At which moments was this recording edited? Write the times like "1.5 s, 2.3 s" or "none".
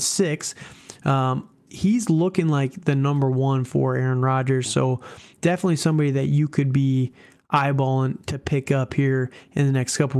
1.7 s